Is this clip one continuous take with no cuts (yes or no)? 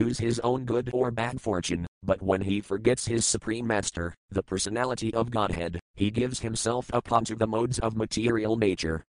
yes